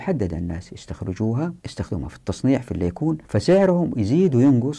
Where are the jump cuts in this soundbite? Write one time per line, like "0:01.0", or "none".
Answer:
0:01.6
0:03.2